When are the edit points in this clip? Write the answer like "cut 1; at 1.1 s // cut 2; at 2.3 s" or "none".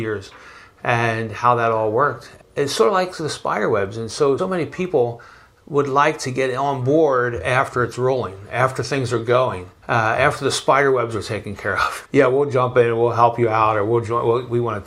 cut 1; at 4.4 s // cut 2; at 9.8 s // cut 3; at 12.1 s